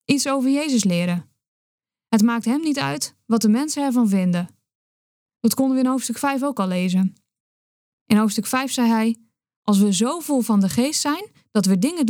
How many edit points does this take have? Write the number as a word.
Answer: one